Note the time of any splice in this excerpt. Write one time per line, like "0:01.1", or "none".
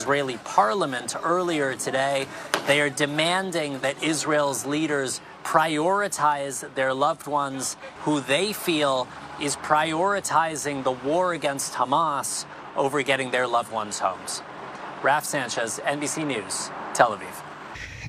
0:08.0